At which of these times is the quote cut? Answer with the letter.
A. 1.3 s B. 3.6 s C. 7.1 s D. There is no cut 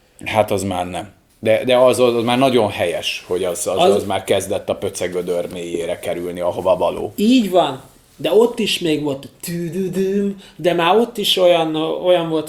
A